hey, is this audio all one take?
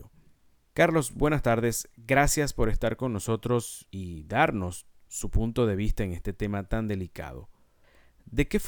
yes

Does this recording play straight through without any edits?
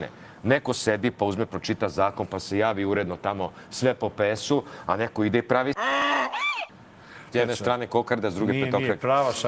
no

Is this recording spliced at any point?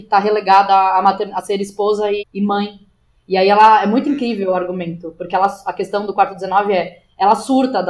yes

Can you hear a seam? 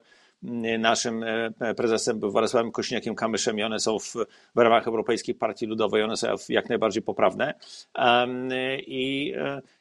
no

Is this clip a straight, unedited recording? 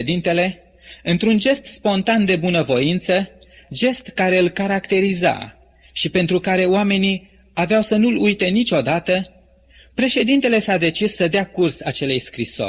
yes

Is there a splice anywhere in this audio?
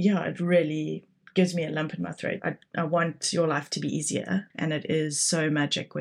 yes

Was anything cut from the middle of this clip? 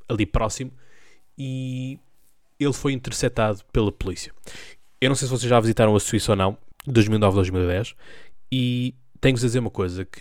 yes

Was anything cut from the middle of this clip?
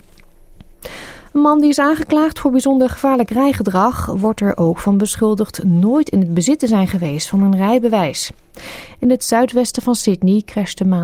no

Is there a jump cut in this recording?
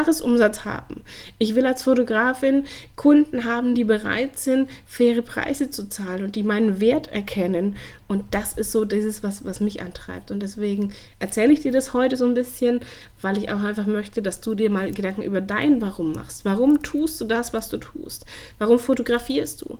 no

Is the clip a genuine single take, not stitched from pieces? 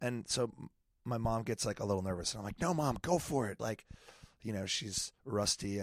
no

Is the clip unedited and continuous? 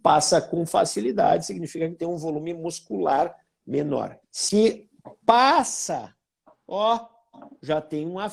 no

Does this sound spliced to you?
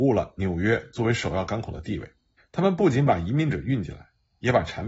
yes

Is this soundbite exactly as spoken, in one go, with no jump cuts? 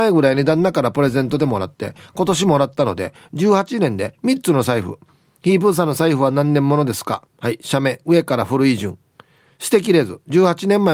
no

